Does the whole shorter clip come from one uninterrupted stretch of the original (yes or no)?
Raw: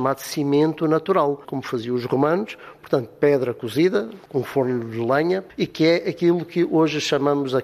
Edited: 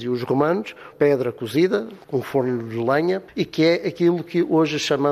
no